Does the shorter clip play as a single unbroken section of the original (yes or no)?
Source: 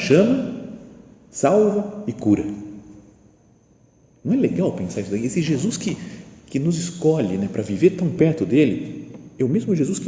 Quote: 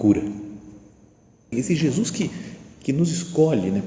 no